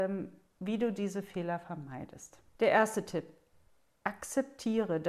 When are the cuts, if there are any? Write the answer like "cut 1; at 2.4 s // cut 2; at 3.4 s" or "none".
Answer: cut 1; at 2.5 s